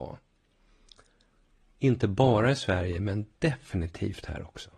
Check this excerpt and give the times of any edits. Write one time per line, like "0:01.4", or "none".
0:01.6
0:03.3